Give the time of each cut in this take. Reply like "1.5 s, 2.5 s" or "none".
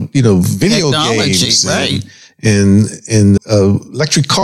3.4 s